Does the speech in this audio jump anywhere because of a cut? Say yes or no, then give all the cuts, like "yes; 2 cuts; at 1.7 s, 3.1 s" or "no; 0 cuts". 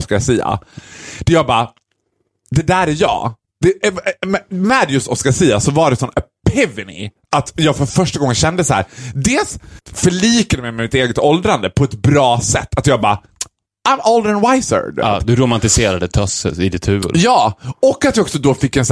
no; 0 cuts